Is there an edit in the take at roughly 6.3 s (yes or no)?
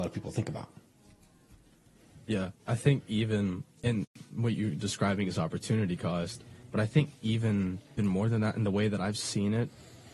no